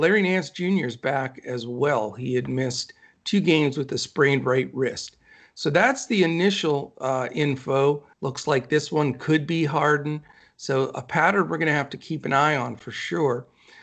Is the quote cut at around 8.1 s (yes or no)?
yes